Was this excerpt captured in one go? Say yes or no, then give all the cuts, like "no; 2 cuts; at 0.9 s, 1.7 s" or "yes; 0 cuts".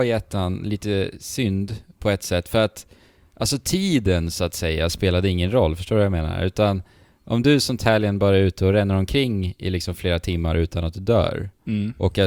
yes; 0 cuts